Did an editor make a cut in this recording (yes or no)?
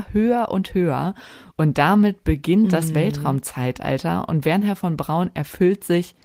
yes